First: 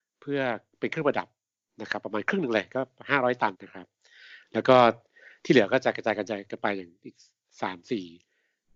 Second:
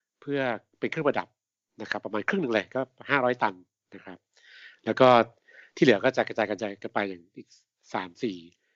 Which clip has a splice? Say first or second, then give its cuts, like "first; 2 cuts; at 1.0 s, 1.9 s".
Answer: first; 1 cut; at 3.5 s